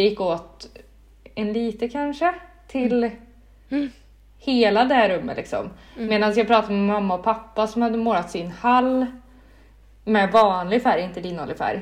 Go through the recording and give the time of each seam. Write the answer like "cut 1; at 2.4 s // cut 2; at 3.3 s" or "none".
none